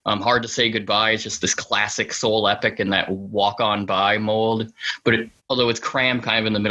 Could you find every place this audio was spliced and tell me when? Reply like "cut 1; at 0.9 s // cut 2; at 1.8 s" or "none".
cut 1; at 5.4 s